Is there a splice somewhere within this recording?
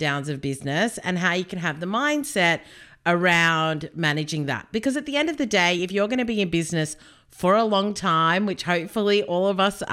no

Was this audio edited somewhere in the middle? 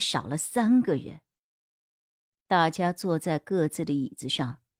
no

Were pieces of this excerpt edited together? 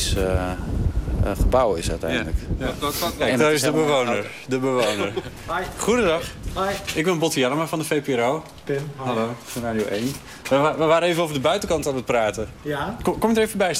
no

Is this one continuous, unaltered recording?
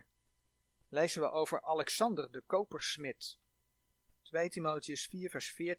yes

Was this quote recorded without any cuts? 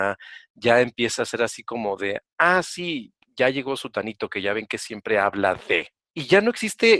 yes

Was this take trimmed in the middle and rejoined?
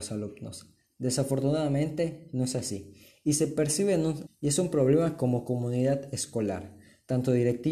yes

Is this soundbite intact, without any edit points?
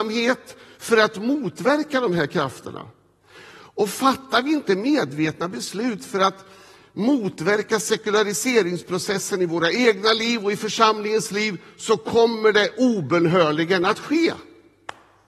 yes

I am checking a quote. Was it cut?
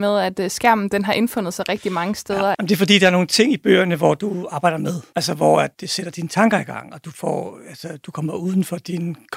yes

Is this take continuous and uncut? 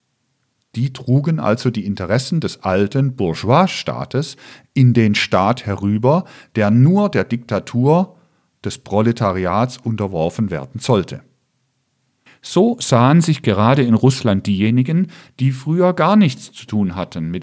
no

